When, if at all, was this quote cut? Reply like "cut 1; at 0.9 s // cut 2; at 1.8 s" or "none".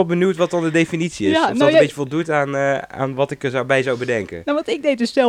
none